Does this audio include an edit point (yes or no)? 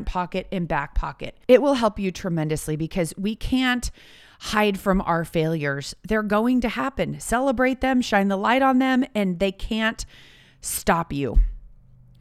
no